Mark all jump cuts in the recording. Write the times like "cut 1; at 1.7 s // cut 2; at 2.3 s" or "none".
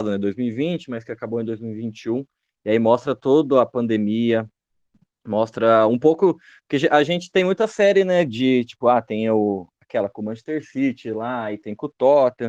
none